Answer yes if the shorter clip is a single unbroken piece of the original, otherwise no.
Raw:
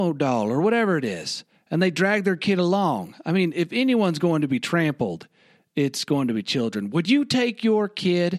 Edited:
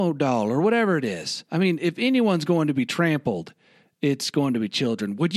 no